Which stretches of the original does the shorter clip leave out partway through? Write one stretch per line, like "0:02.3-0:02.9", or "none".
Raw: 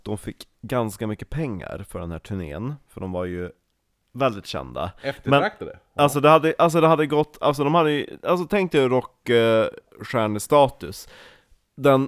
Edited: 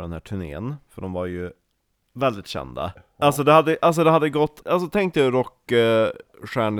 0:04.9-0:05.7
0:07.4-0:08.2